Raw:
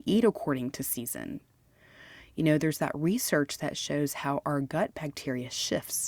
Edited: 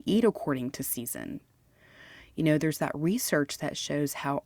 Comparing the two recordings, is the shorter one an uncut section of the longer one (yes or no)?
yes